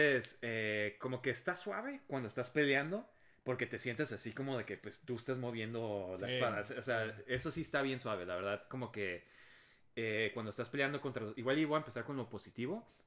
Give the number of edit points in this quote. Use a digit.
0